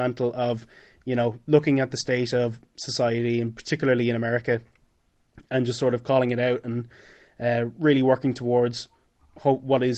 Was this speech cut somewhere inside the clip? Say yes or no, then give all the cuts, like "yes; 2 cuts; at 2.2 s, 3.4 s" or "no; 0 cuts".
no; 0 cuts